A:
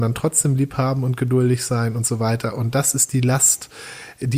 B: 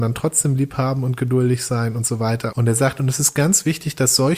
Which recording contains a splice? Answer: B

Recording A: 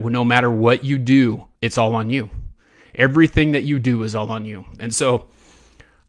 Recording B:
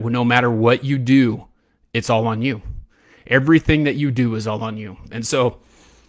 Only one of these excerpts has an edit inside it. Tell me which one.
A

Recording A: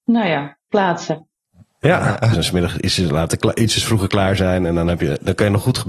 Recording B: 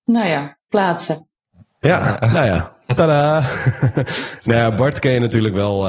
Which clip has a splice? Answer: A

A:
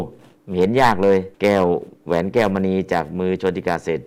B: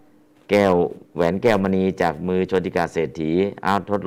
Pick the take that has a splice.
A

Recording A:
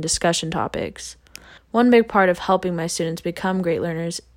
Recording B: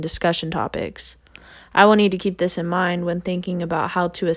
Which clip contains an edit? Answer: A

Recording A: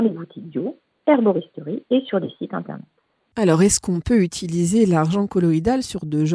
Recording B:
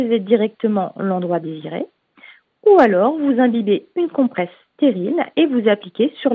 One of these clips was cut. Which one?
A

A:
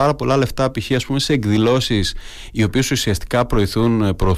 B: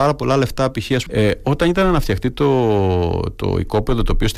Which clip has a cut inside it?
B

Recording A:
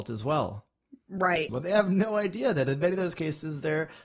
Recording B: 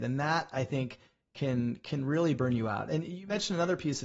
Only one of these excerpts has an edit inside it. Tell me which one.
A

